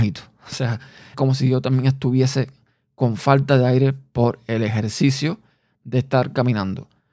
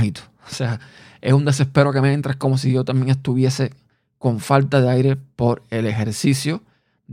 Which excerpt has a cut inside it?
first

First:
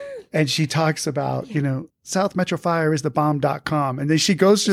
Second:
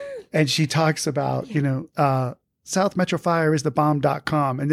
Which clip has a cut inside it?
first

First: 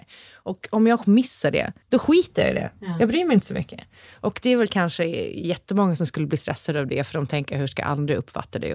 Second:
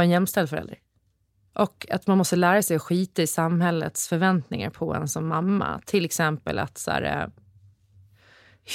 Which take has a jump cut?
first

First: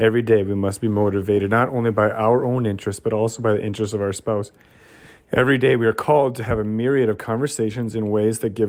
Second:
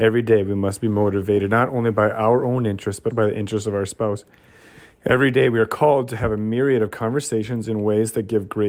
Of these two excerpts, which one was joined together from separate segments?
second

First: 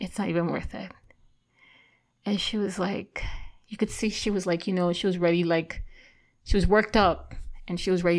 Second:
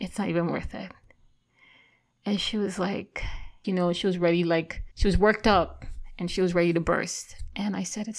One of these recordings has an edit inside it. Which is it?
second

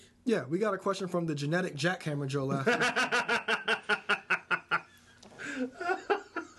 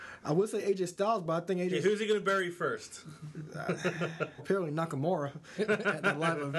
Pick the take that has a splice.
second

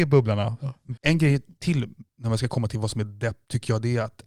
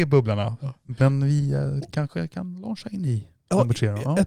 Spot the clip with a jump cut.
first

